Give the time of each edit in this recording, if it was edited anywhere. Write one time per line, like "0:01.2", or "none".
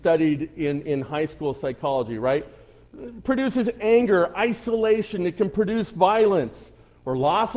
none